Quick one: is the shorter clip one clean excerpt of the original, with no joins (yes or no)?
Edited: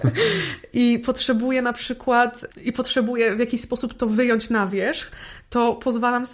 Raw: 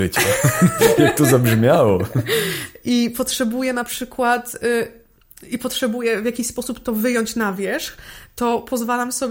no